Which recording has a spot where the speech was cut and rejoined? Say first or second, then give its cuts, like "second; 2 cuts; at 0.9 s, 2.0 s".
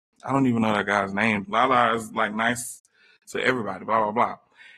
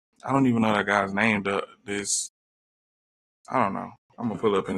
first; 1 cut; at 1.4 s